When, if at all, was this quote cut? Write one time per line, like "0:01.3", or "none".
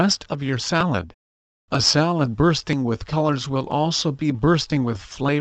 0:01.5